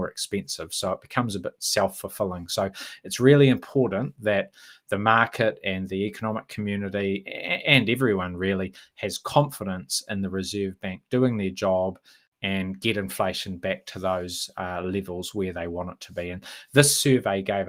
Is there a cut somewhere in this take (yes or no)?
no